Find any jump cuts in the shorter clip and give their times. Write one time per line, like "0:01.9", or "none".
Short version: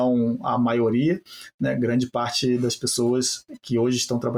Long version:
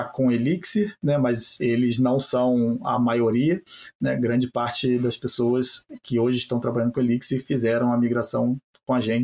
none